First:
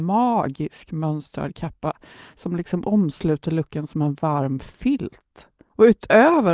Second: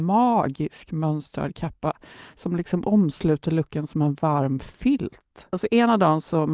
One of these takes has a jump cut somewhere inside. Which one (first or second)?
second